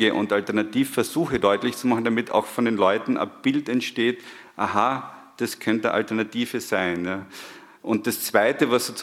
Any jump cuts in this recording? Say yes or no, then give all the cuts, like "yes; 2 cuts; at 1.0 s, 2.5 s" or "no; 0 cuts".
no; 0 cuts